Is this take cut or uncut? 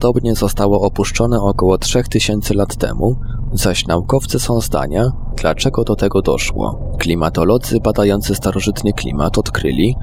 cut